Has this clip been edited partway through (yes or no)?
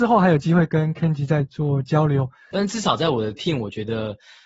yes